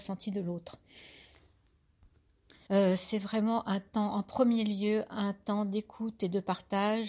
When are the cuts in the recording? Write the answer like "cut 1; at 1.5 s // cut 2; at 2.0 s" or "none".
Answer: cut 1; at 2.7 s